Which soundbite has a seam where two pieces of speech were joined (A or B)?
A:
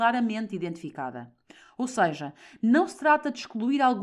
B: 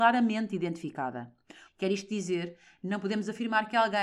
B